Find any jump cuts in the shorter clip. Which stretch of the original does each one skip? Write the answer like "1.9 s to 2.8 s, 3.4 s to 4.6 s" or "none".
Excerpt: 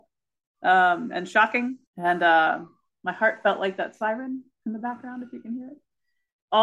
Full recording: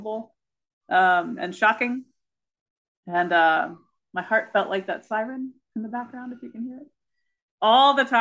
2.1 s to 3.0 s

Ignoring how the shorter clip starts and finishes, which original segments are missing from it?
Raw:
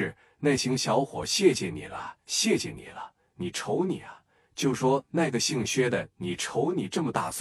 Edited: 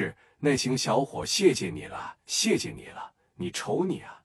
none

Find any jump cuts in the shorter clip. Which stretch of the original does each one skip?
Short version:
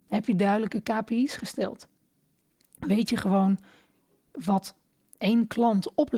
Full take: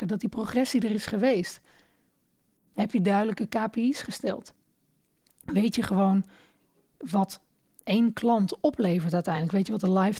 none

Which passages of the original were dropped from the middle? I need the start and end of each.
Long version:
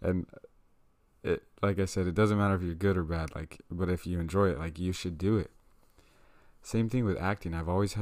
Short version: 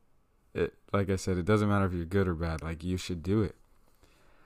3.3 s to 4.6 s

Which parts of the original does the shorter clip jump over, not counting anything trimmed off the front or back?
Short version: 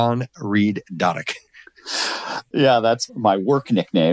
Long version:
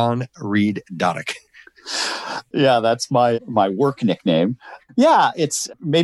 3.1 s to 3.4 s

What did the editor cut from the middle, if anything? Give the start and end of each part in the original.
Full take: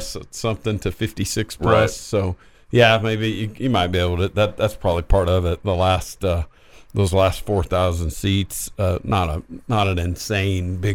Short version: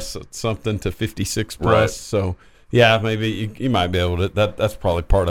none

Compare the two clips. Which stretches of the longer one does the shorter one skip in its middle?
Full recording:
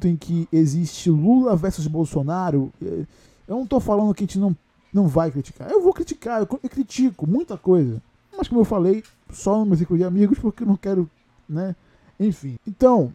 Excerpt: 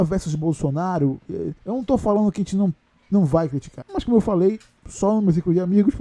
3.1 s to 3.4 s, 5.6 s to 8.3 s

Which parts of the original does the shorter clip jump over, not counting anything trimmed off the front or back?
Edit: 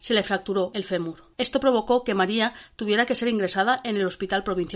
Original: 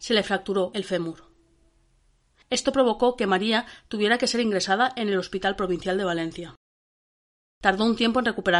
1.3 s to 2.5 s

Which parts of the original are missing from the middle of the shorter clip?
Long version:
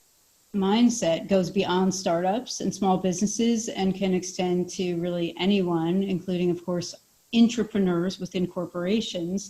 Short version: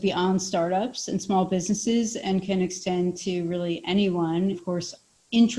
6.0 s to 6.5 s

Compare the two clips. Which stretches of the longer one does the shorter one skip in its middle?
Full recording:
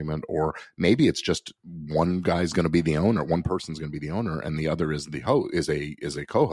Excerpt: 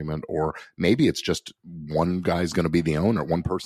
none

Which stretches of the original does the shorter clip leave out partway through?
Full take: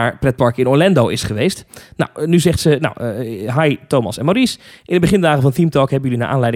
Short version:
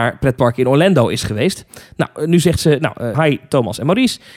3.1 s to 3.5 s

